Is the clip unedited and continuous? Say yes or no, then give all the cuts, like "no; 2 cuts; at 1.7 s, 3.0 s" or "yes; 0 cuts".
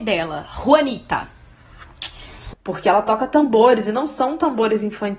no; 1 cut; at 2.5 s